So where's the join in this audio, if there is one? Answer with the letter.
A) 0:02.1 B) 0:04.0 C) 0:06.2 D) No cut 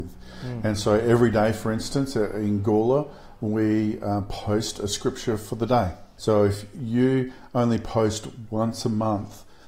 C